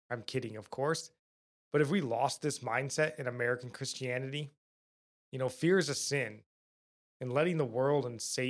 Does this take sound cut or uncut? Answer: cut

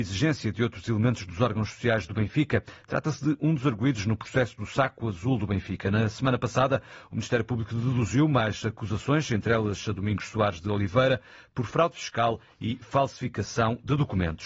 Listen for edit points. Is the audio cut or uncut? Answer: uncut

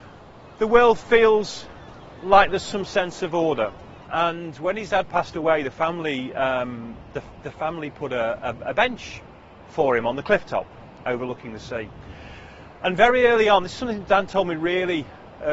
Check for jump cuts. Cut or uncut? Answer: cut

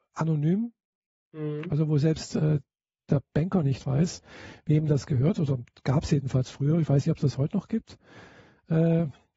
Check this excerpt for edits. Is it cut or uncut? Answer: uncut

